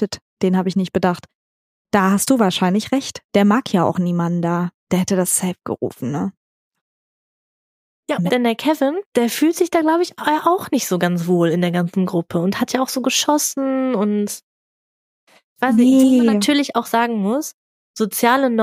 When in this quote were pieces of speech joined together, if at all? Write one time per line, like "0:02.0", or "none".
0:08.3